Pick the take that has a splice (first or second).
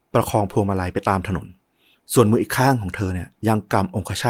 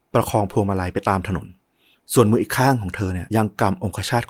second